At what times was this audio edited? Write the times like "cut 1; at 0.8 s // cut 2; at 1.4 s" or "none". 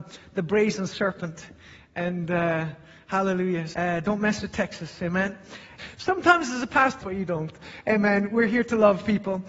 cut 1; at 3.7 s // cut 2; at 5.8 s // cut 3; at 7.0 s